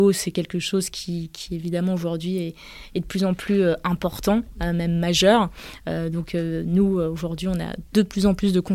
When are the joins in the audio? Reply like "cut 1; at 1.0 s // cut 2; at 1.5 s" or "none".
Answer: none